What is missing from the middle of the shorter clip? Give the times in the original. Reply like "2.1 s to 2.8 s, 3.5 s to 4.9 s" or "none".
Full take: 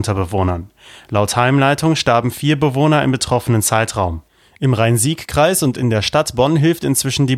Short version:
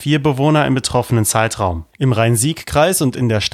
4.3 s to 4.5 s